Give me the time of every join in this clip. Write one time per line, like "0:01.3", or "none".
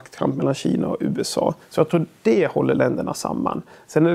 0:01.6